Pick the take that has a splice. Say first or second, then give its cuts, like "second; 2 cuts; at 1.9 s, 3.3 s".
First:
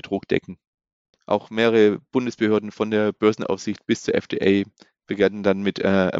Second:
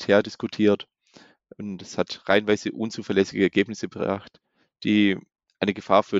first; 1 cut; at 1.1 s